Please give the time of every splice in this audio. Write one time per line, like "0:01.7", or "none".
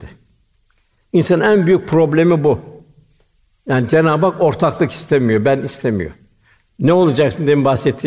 0:06.7